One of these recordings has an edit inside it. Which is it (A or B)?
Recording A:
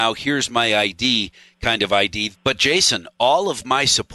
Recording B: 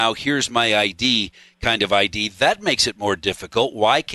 A